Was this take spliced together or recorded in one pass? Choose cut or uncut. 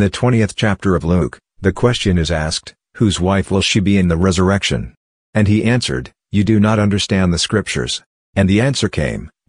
cut